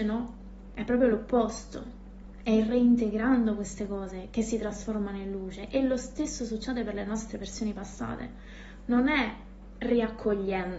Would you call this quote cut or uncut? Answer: uncut